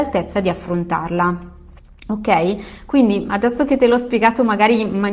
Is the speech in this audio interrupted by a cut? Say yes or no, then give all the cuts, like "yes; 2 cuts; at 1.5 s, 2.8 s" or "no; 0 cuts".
no; 0 cuts